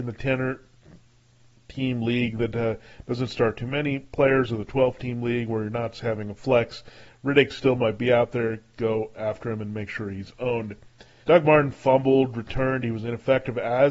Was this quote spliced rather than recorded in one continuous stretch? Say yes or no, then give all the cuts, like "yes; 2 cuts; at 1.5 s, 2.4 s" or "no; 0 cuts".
yes; 1 cut; at 11.2 s